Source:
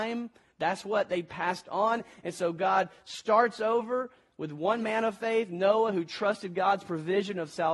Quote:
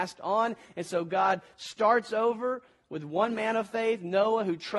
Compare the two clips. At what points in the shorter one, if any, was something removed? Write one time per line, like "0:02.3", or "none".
none